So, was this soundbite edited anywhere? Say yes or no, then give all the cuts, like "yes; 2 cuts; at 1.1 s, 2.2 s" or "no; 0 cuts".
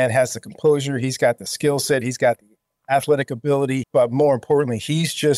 yes; 1 cut; at 3.8 s